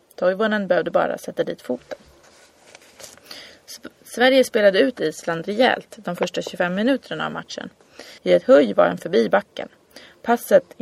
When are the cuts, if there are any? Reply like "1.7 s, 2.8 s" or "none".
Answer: 8.2 s